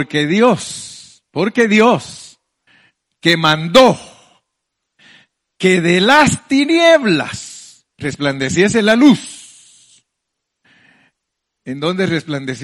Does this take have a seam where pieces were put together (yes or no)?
yes